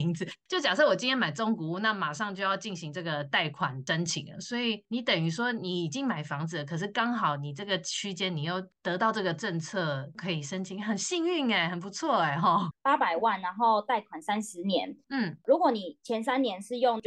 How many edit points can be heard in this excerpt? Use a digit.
1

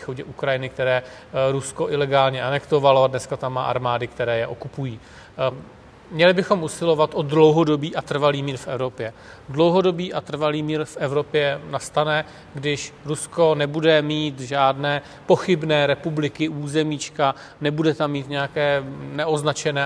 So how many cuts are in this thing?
1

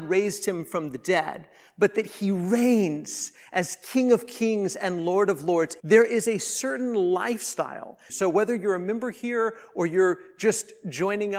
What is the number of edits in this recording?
2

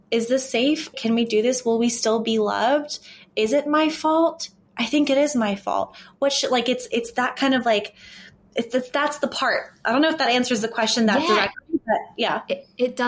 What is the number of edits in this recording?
1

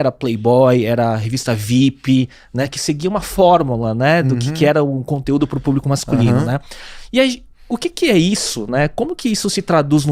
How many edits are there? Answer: 0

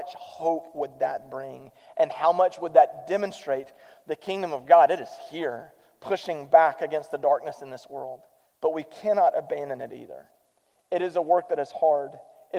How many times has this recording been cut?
1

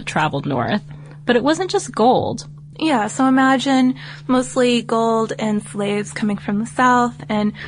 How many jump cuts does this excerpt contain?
1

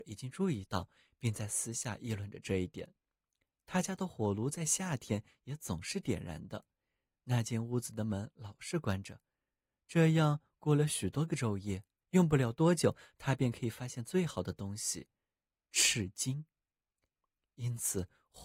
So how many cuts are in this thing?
1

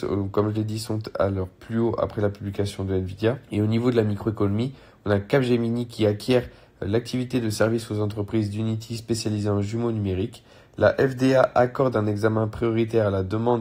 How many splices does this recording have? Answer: 1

